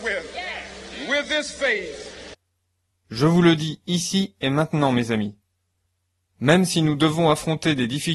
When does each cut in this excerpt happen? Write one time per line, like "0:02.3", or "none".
none

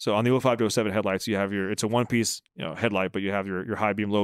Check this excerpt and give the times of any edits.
0:02.5

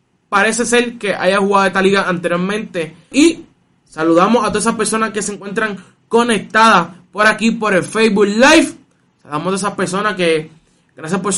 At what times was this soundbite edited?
0:03.1

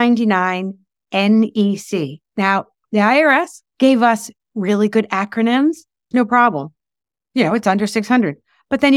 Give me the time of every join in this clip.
0:03.7
0:06.1

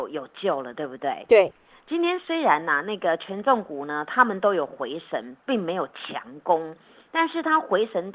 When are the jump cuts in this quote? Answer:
none

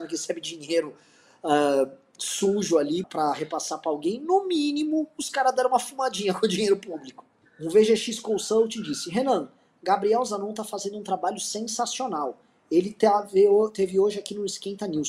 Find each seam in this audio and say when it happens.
0:03.0
0:07.4

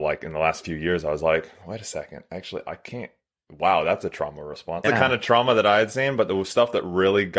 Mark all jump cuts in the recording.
0:04.8

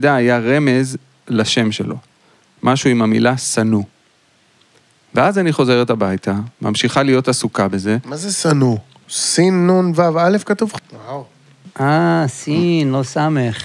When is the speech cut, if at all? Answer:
0:10.8

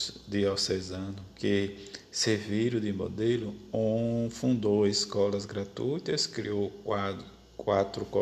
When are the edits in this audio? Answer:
none

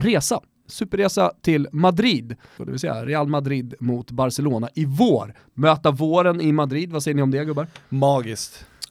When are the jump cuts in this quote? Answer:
0:02.6

